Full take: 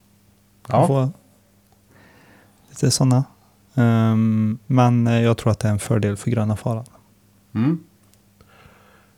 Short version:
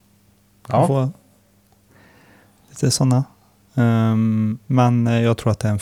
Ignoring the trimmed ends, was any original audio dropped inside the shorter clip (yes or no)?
no